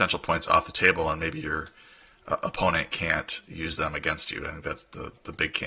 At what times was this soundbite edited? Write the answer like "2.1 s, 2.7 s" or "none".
none